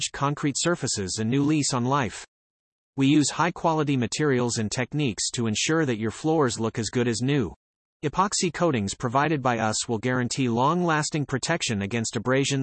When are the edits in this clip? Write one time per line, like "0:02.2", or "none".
0:07.9